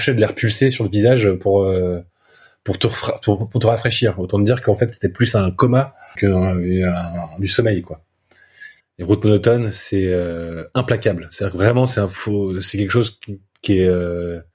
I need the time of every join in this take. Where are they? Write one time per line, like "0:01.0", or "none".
0:06.2
0:08.8